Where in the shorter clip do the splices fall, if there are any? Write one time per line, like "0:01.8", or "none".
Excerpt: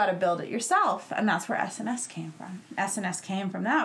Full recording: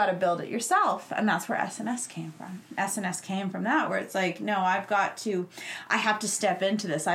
none